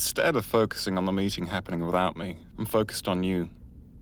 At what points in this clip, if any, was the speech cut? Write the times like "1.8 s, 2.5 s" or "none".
2.5 s